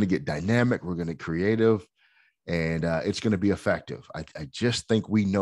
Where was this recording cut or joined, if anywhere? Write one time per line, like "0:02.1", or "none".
none

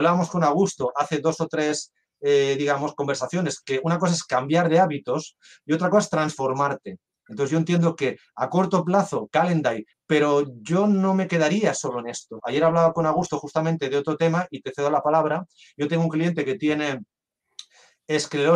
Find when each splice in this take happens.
0:09.9
0:12.4

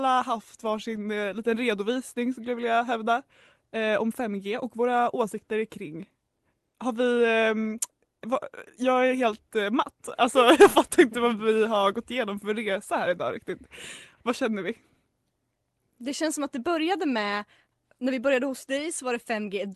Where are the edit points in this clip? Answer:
0:08.2
0:14.2

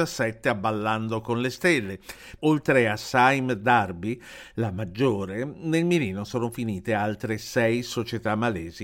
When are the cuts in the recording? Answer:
0:02.4

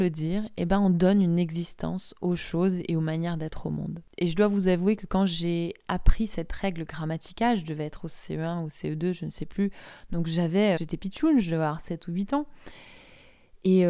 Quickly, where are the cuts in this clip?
0:04.1
0:10.8

